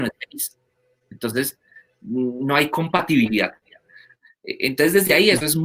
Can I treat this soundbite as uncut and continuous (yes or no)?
yes